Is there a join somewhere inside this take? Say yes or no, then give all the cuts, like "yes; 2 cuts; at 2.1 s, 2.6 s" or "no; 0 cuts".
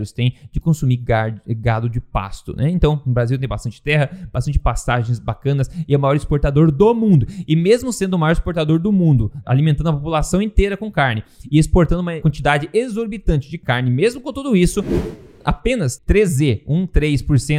yes; 1 cut; at 16.0 s